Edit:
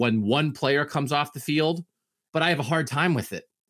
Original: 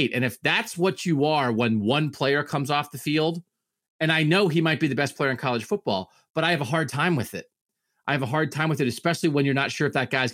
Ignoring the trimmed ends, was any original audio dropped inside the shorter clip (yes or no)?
yes